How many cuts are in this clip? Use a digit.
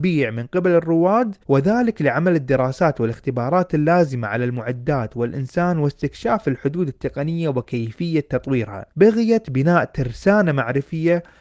2